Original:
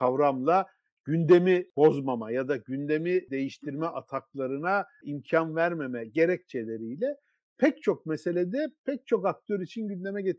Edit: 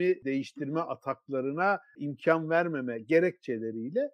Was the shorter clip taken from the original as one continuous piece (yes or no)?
yes